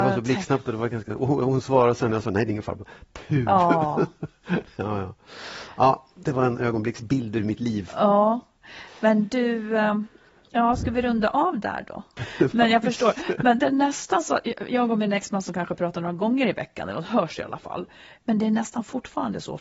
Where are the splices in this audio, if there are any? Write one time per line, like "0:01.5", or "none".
0:04.4
0:12.2